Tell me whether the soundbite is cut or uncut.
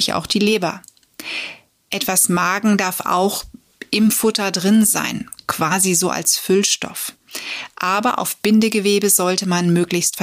uncut